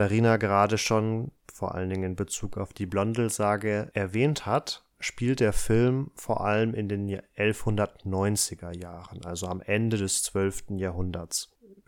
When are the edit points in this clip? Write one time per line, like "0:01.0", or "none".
none